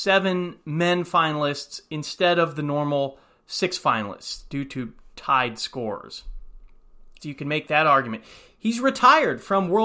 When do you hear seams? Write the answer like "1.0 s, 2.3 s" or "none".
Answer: 7.2 s